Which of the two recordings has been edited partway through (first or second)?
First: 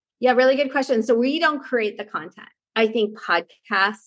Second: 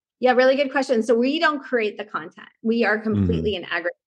first